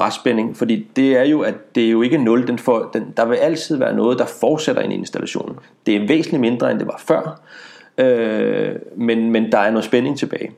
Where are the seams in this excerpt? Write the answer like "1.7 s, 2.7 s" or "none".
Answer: none